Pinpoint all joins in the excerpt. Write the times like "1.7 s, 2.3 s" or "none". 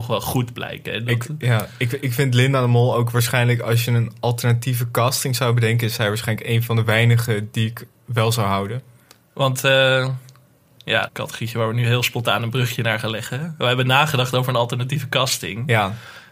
11.1 s